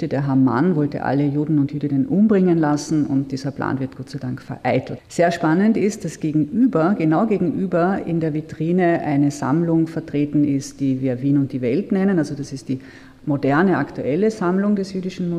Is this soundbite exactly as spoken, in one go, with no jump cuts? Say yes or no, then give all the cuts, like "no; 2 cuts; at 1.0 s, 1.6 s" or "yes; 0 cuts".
no; 1 cut; at 5.0 s